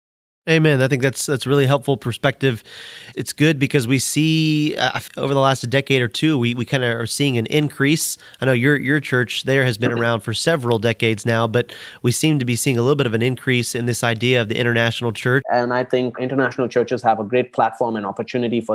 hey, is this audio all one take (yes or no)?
no